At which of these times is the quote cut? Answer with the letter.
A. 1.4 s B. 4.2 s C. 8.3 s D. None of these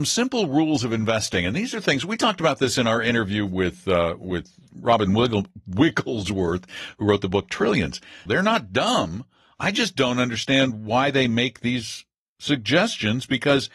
C